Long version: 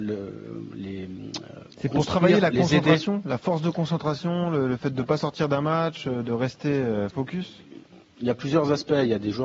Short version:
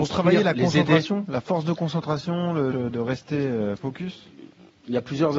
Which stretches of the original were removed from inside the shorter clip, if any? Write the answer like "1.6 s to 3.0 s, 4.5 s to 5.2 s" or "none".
4.7 s to 6.0 s